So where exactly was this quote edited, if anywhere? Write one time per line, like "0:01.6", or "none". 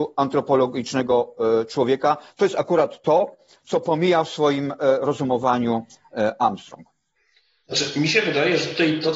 none